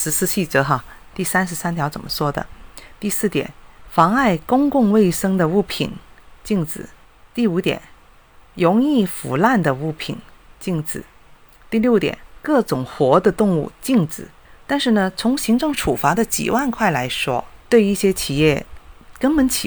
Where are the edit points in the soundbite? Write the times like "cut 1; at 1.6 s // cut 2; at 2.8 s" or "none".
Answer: none